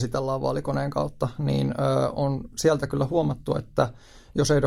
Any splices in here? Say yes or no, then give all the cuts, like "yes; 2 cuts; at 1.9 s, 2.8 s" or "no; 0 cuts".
no; 0 cuts